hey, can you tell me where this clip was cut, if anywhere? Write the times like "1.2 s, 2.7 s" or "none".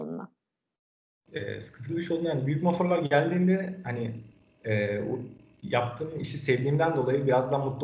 none